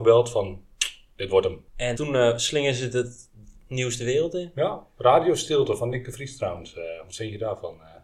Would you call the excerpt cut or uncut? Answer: cut